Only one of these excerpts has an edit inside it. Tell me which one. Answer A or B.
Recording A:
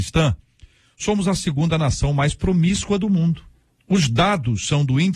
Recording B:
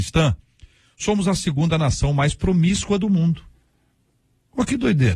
A